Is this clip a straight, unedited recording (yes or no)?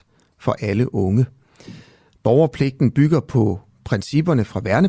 yes